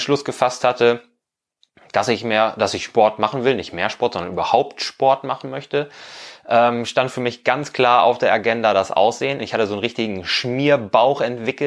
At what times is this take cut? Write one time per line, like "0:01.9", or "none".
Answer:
0:09.4